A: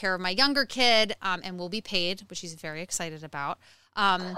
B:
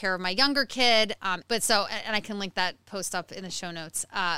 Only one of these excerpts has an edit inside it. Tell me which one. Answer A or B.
B